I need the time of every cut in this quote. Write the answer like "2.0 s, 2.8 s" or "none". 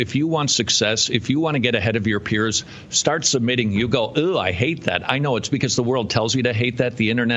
none